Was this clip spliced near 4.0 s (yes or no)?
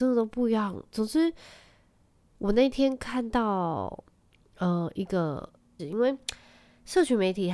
no